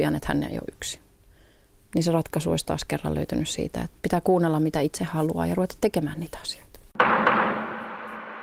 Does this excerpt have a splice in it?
yes; 1 cut; at 4.0 s

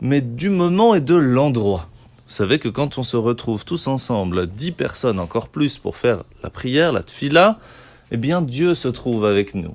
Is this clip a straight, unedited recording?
yes; 0 cuts

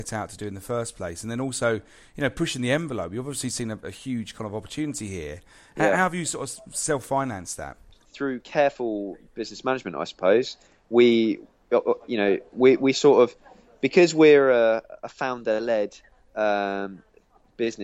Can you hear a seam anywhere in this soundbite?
no; 0 cuts

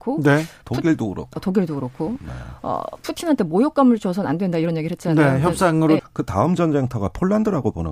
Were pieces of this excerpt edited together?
yes; 1 cut; at 6.0 s

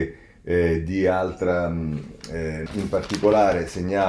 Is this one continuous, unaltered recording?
no; 1 cut; at 2.7 s

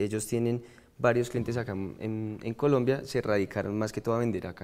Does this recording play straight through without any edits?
yes; 0 cuts

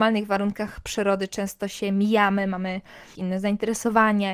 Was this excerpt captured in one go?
no; 1 cut; at 3.2 s

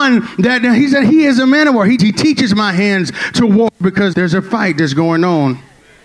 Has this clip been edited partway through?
yes; 2 cuts; at 2.0 s, 4.1 s

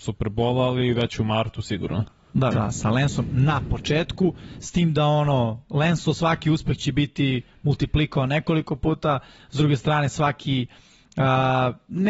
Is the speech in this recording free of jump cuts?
no; 1 cut; at 2.5 s

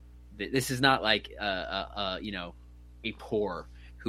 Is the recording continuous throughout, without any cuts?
yes; 0 cuts

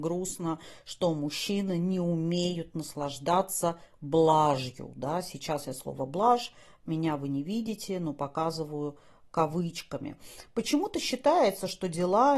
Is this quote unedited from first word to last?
yes; 0 cuts

